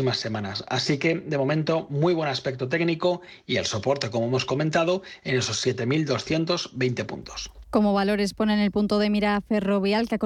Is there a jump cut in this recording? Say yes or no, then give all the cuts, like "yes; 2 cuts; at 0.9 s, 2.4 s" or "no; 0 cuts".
no; 0 cuts